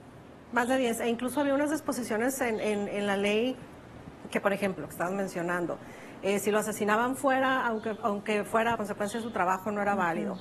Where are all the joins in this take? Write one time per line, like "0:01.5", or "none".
0:04.8
0:08.8